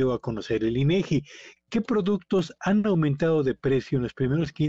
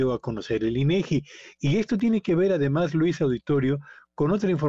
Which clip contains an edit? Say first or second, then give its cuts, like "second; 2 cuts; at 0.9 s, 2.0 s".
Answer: first; 1 cut; at 1.6 s